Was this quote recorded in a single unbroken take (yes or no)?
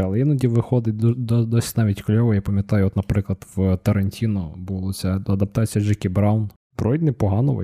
yes